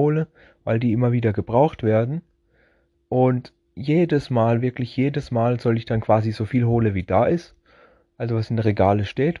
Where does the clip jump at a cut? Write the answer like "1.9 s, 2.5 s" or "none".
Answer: none